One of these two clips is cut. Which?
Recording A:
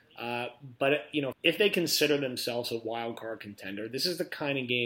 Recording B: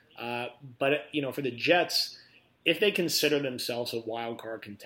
A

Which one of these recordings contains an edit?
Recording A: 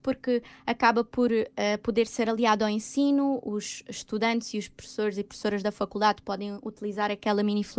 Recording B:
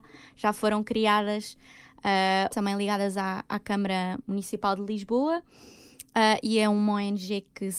B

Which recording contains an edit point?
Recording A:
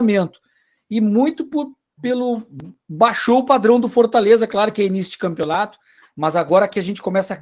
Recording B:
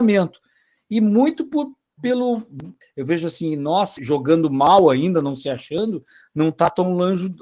B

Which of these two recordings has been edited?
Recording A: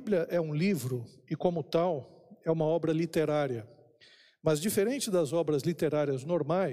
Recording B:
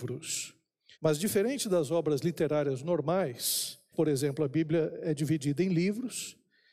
B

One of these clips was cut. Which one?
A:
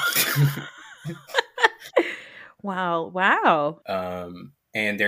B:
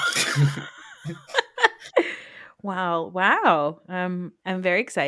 A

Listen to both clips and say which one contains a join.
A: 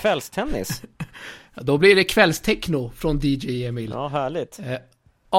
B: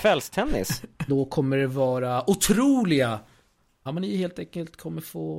B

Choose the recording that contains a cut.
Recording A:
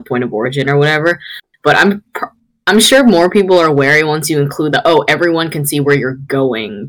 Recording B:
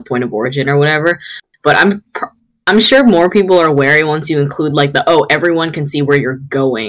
A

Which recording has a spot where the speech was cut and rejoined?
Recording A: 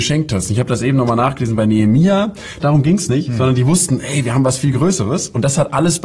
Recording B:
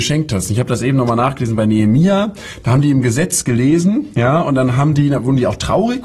A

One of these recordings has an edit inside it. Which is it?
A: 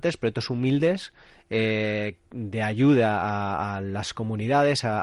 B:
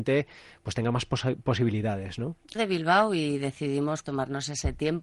B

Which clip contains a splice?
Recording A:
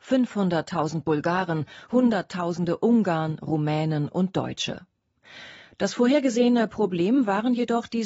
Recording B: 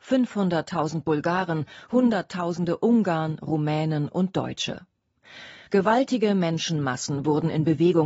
B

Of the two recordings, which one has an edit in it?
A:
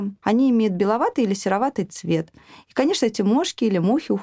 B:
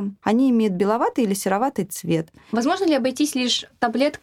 B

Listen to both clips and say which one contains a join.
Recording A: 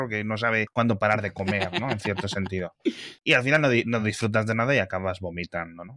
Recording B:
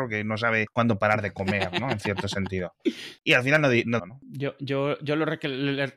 B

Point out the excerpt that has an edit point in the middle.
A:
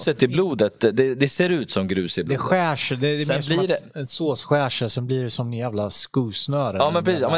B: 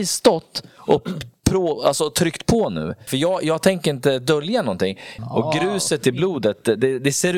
B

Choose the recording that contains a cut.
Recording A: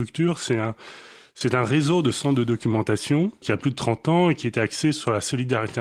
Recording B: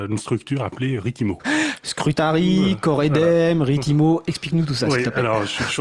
B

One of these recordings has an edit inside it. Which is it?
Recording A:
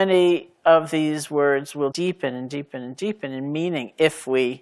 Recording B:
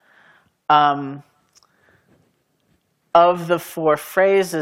A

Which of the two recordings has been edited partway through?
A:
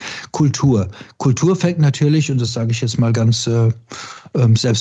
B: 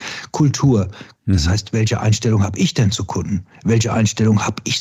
B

